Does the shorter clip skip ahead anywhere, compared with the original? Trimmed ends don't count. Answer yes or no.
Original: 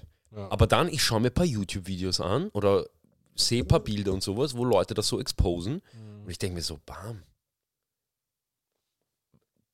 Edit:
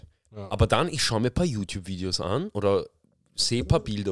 no